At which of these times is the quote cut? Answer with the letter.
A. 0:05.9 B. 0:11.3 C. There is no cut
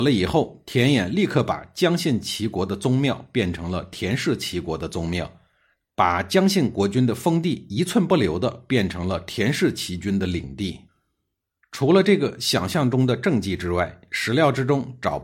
C